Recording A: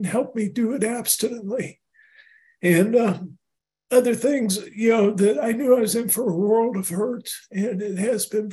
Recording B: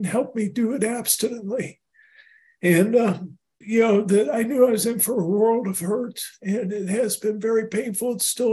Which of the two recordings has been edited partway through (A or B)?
B